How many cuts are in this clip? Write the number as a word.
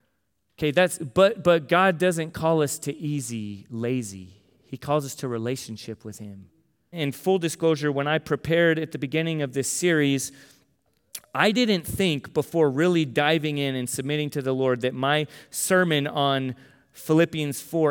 one